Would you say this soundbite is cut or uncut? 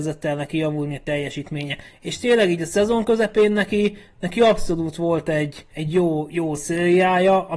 cut